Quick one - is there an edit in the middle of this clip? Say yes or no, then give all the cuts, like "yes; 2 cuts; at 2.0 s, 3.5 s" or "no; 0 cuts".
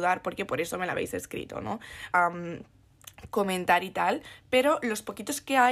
yes; 1 cut; at 2.1 s